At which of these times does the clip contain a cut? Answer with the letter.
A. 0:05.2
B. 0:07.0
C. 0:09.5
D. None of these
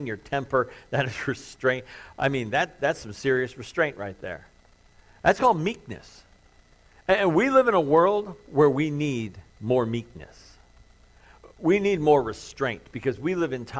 C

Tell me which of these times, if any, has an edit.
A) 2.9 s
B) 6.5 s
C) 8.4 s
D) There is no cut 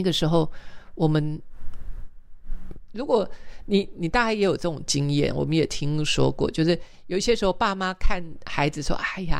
A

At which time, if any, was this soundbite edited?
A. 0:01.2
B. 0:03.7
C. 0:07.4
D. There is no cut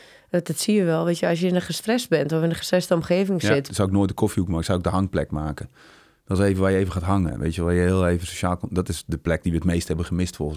B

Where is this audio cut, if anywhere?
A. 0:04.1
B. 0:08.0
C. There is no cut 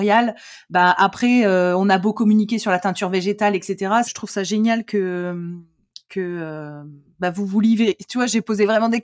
A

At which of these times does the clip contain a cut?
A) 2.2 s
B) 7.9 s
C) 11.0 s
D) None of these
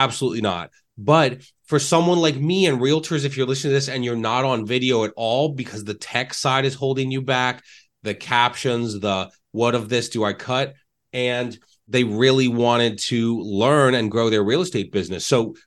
C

